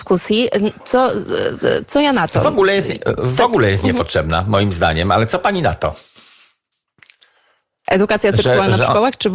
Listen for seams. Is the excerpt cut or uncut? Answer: uncut